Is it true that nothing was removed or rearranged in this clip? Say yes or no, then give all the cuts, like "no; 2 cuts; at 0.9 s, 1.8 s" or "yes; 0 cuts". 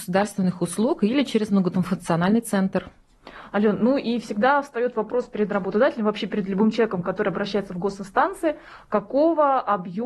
yes; 0 cuts